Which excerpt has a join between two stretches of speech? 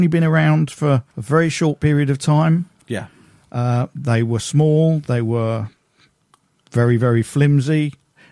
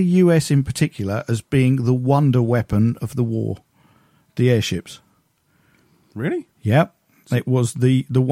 first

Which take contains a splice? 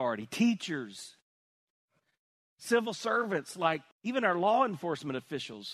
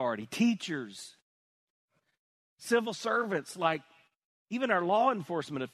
first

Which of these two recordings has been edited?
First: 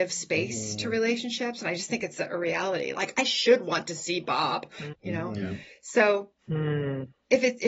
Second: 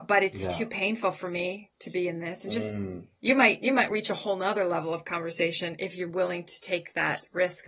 first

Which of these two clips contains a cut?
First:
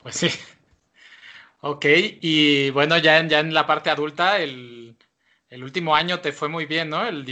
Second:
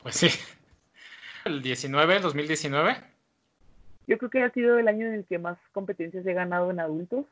second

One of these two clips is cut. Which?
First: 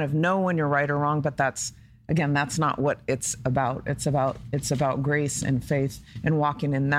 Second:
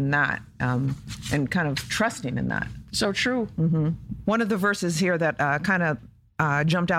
second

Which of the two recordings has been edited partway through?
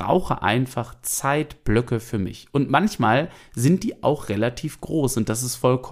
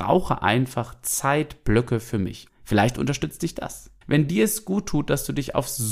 second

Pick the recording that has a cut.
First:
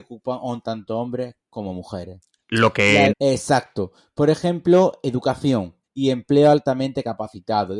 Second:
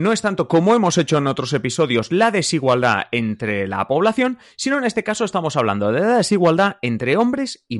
first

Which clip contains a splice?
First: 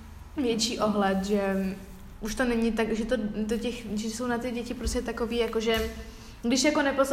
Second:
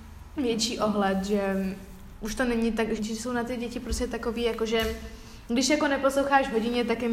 second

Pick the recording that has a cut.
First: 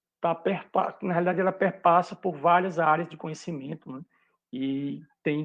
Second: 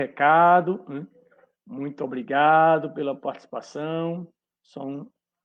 second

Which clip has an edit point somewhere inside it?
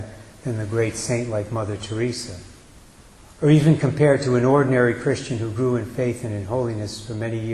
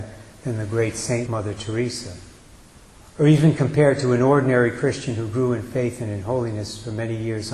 second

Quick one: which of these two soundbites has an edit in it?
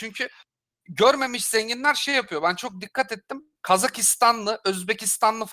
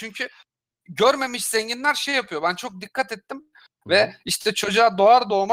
second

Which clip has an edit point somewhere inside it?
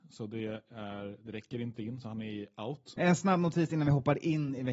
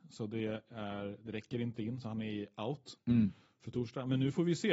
first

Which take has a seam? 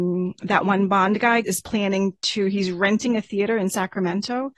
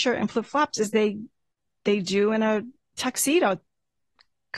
first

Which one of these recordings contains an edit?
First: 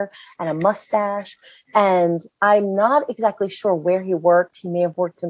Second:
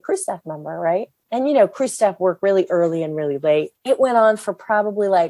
second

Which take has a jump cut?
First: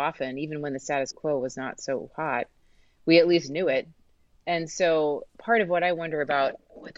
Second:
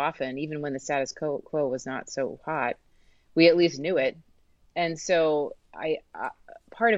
first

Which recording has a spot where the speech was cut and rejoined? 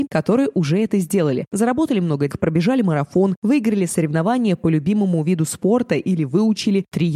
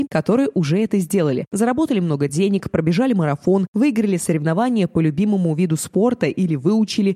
first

